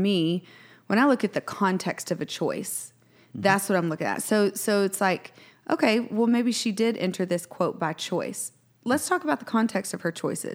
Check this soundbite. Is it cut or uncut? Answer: uncut